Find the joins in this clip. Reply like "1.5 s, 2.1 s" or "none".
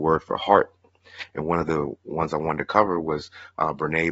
1.3 s